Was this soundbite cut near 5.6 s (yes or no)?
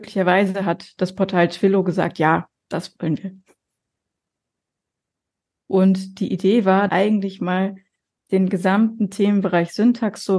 yes